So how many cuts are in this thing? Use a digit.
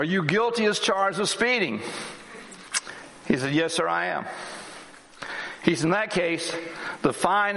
0